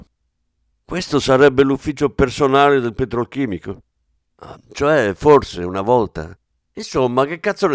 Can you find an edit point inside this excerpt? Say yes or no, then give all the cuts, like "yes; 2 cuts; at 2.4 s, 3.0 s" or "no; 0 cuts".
yes; 1 cut; at 4.5 s